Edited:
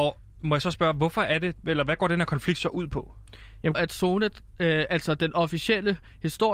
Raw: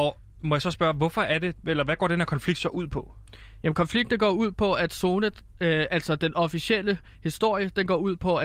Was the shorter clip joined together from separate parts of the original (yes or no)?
yes